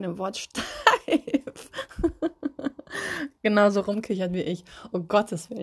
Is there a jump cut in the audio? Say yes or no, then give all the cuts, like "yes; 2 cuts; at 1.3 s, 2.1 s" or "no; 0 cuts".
no; 0 cuts